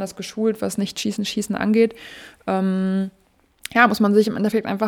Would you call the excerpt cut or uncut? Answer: uncut